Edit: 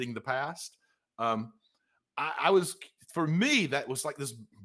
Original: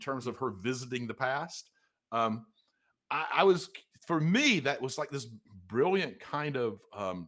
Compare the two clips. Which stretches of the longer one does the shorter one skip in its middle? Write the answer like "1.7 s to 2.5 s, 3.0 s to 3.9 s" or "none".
none